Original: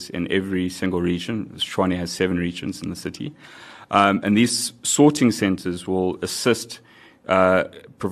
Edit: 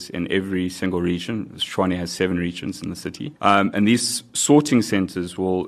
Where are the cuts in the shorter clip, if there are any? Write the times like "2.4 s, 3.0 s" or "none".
3.4 s